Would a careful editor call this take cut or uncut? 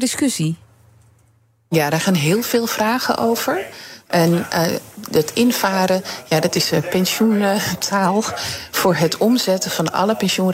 uncut